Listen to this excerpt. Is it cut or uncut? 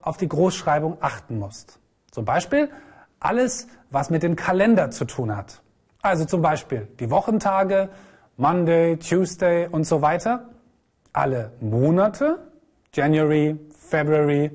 uncut